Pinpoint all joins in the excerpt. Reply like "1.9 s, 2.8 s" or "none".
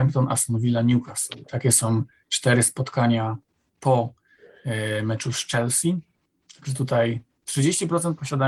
none